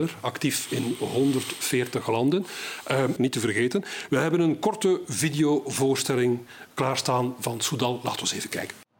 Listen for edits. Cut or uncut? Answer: cut